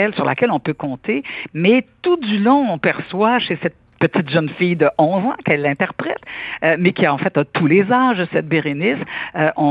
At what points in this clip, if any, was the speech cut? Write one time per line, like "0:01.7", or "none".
0:01.5